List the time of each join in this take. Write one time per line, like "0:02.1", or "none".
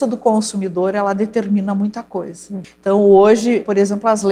0:02.6